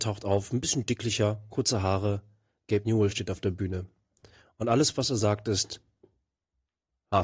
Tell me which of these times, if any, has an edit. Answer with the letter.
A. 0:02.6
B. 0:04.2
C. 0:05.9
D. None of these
D